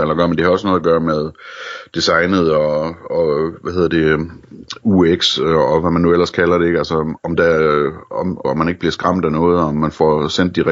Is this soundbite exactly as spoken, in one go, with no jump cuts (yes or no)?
no